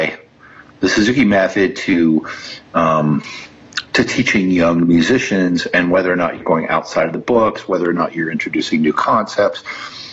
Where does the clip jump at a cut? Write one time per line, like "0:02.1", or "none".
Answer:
none

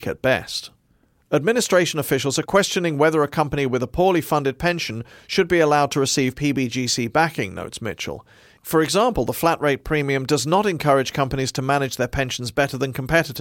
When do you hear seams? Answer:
0:08.6

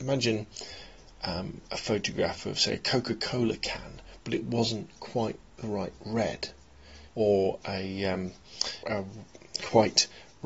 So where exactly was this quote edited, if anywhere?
0:07.1
0:08.8

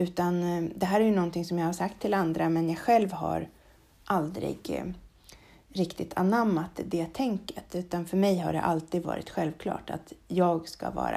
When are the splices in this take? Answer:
none

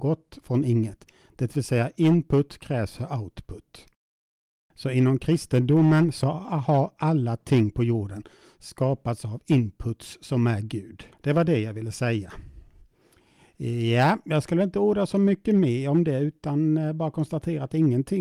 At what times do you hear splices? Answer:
none

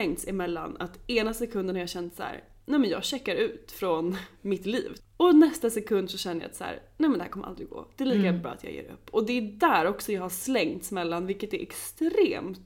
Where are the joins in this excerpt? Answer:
0:05.0

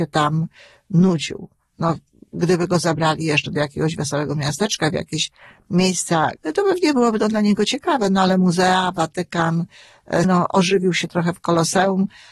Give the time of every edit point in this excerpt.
0:06.4
0:10.2

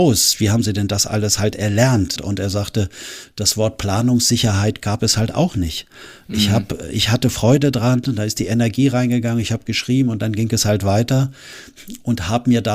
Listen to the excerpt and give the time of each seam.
0:02.2

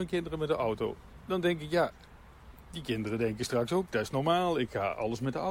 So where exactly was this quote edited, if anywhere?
none

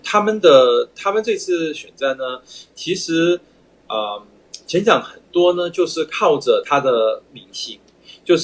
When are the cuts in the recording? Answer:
none

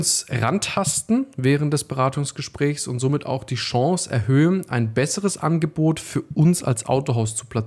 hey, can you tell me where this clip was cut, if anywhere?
none

